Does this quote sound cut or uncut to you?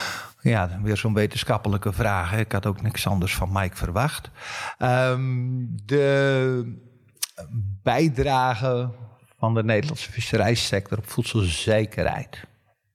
uncut